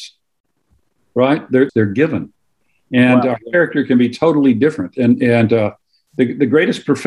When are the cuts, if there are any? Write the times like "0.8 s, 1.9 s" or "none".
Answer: 1.7 s